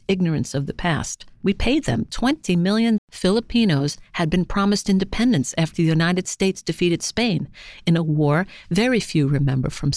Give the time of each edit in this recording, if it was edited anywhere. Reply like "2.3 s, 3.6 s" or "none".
1.4 s, 3.0 s

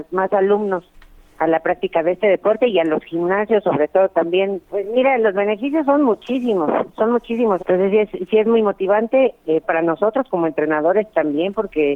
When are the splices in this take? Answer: 4.6 s, 7.6 s, 9.6 s

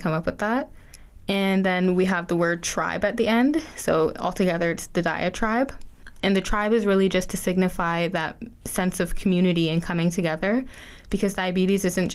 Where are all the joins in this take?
none

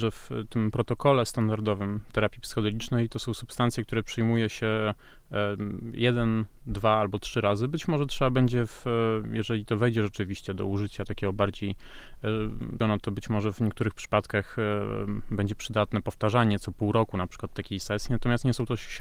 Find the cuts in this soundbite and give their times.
12.8 s

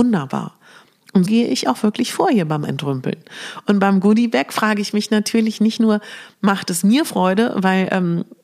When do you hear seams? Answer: 1.2 s

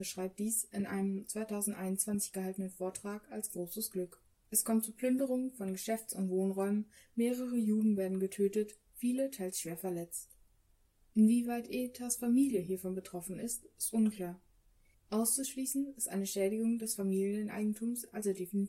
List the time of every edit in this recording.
4.4 s, 14.9 s

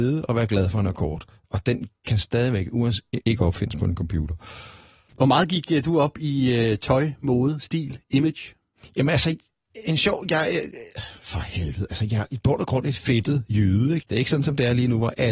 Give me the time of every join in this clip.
3.2 s, 14.0 s

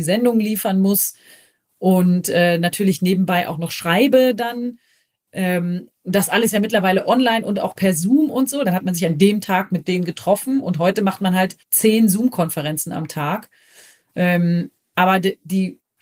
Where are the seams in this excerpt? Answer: 8.6 s, 9.8 s, 11.6 s

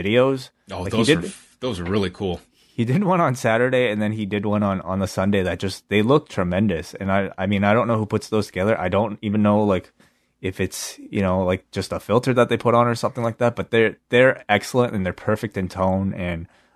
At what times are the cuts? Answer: none

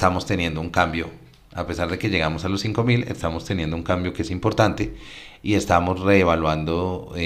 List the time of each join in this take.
none

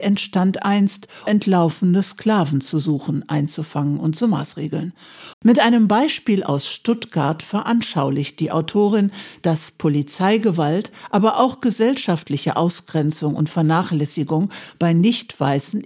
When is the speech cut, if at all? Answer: 1.3 s, 5.3 s

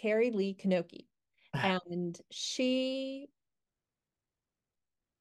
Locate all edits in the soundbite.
none

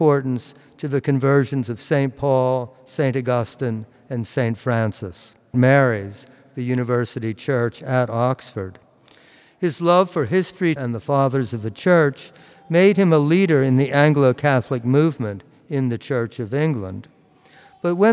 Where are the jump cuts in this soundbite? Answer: 5.5 s, 10.8 s

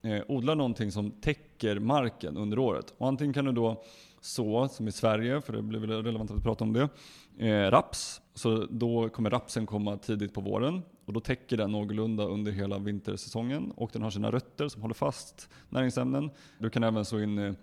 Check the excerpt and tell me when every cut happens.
8.3 s, 16.6 s

